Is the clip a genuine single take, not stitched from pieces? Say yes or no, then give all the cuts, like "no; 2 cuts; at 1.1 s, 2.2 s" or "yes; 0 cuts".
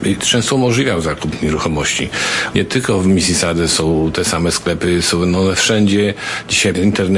no; 1 cut; at 2.5 s